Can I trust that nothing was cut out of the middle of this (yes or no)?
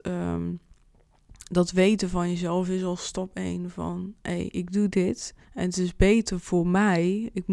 no